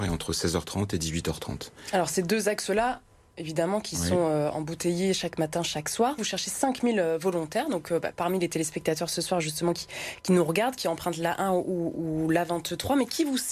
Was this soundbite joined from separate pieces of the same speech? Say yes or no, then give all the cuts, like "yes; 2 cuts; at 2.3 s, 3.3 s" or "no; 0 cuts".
yes; 1 cut; at 6.2 s